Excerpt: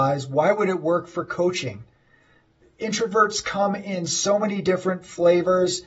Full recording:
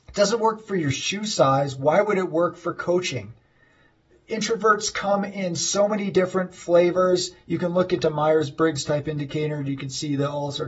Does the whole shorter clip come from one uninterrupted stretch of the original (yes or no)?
yes